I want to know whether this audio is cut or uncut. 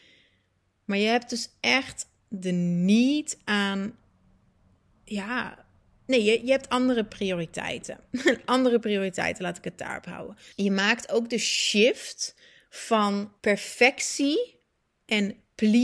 cut